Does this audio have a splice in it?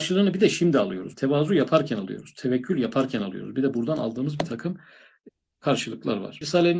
no; 0 cuts

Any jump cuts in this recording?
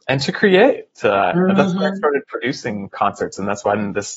no; 0 cuts

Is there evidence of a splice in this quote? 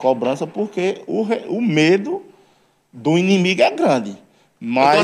no; 0 cuts

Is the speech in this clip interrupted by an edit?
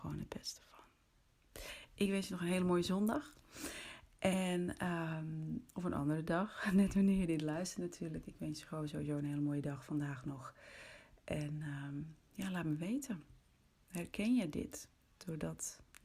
yes; 1 cut; at 15.0 s

